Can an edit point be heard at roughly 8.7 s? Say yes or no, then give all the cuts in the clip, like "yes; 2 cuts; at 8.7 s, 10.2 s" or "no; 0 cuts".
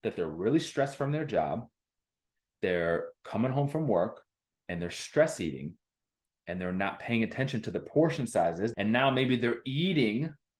yes; 1 cut; at 8.7 s